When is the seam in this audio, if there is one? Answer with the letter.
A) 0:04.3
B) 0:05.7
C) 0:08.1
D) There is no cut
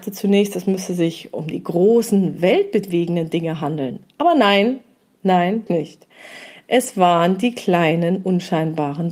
B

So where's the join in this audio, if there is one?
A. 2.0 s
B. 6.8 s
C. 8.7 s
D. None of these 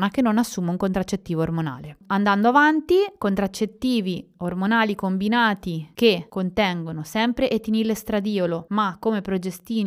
D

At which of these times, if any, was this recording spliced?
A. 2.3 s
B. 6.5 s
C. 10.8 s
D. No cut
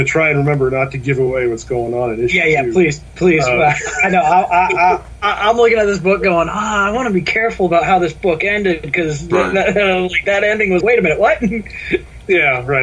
C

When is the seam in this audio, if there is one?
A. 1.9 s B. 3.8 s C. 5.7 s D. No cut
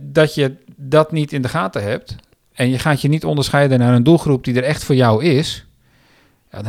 D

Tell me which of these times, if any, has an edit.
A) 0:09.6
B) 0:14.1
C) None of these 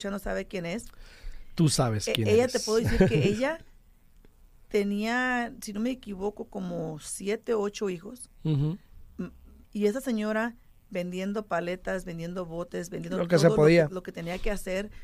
A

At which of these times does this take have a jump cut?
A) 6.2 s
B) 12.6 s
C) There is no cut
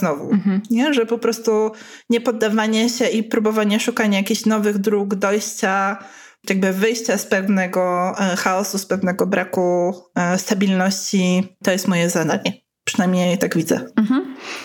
C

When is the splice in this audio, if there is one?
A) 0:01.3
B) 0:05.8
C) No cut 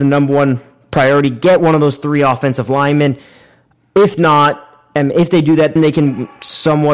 B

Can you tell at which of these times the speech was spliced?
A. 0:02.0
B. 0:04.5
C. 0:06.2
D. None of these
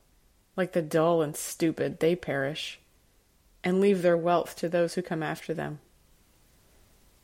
D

